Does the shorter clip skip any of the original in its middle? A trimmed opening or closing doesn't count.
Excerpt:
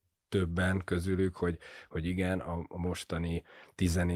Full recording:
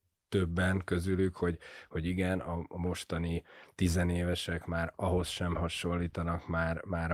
no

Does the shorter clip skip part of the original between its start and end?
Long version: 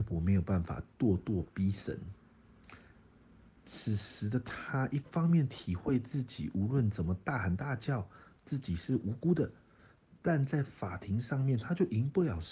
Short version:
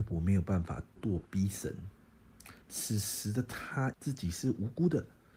yes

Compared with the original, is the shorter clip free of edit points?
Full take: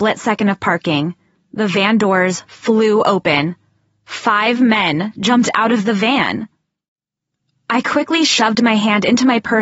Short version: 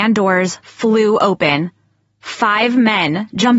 yes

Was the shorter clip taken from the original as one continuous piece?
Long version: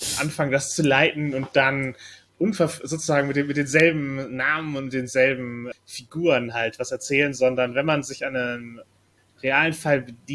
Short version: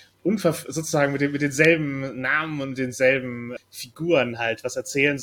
yes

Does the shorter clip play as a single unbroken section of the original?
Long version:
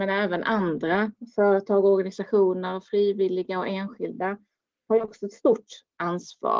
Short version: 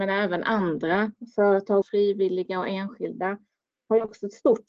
no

